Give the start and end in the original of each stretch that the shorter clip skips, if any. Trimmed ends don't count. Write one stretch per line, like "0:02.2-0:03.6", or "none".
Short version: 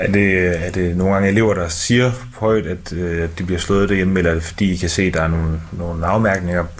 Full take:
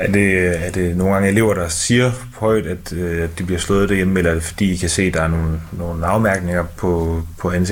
none